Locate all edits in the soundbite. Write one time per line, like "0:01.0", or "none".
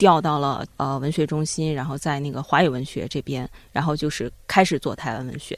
none